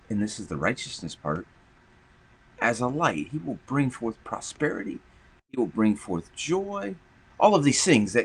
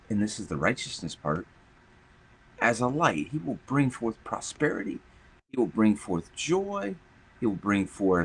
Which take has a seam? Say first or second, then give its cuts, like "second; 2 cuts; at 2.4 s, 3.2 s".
first; 1 cut; at 7.3 s